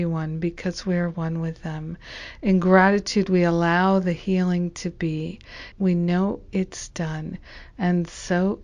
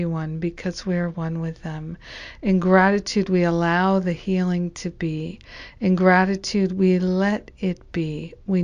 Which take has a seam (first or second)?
first